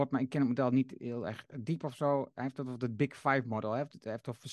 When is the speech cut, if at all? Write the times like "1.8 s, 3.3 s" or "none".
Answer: none